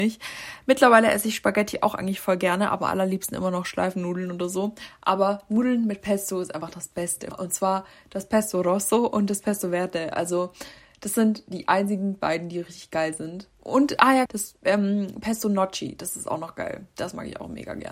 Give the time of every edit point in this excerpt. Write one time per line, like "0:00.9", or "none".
0:07.3
0:14.3